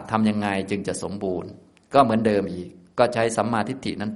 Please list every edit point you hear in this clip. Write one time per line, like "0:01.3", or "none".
none